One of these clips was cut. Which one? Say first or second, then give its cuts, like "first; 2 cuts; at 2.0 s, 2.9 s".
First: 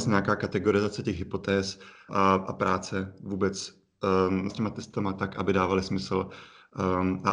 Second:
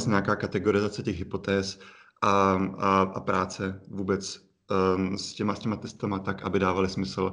first; 2 cuts; at 2.1 s, 4.5 s